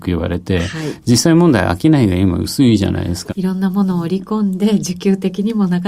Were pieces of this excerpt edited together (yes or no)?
yes